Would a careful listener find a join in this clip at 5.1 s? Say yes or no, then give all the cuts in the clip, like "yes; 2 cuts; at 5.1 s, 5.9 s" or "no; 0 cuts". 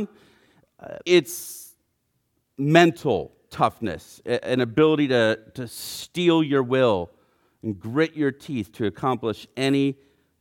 no; 1 cut; at 1.1 s